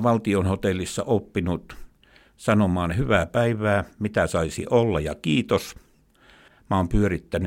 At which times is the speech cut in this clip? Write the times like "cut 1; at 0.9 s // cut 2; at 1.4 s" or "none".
cut 1; at 6.5 s